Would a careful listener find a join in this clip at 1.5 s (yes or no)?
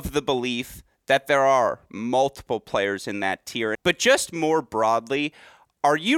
no